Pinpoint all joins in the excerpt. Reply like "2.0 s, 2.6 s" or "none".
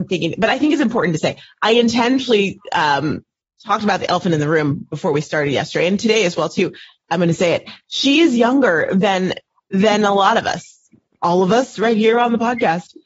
none